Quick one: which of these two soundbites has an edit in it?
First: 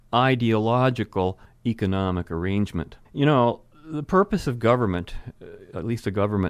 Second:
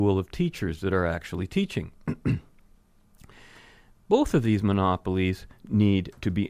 first; 1 cut; at 3.0 s

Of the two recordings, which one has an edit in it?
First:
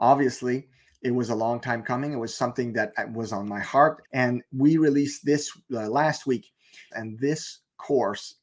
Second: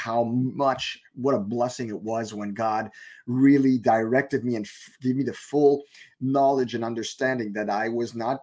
first; 2 cuts; at 4.0 s, 6.9 s

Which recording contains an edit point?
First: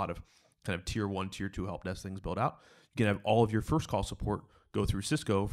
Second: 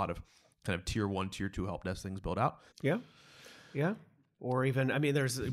second; 1 cut; at 2.7 s

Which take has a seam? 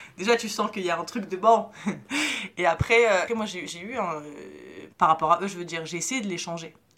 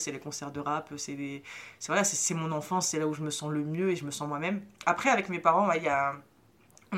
first; 2 cuts; at 3.3 s, 4.9 s

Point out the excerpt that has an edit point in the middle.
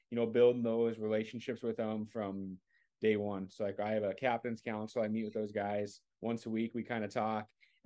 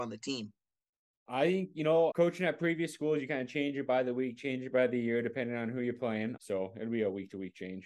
second; 2 cuts; at 2.1 s, 6.4 s

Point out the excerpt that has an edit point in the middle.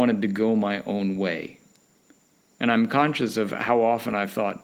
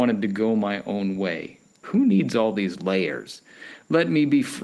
second; 1 cut; at 1.8 s

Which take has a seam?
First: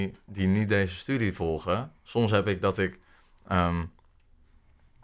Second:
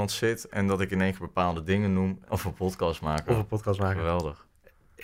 second; 1 cut; at 2.2 s

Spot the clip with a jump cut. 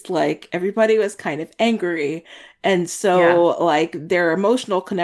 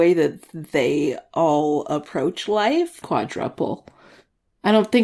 second; 1 cut; at 3.0 s

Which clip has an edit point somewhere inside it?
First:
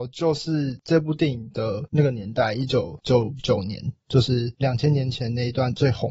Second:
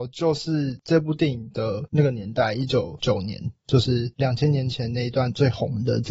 second; 1 cut; at 3.0 s

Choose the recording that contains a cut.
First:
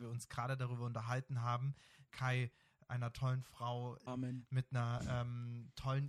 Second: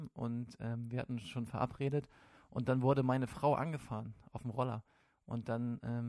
first; 2 cuts; at 2.1 s, 4.1 s

